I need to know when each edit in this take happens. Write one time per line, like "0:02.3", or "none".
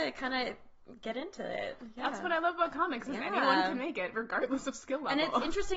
none